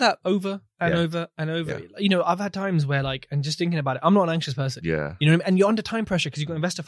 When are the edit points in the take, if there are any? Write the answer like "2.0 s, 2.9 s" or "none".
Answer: 4.8 s